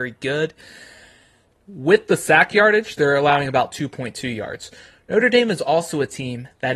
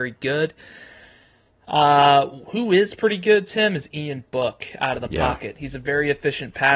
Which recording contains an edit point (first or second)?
first